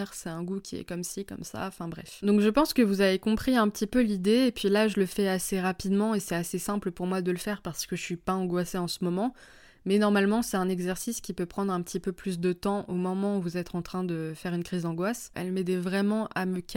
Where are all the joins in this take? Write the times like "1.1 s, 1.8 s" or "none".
15.3 s